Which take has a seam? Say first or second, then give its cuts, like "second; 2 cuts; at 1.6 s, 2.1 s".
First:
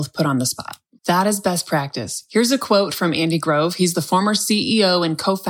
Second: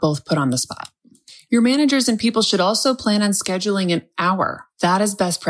first; 1 cut; at 1.0 s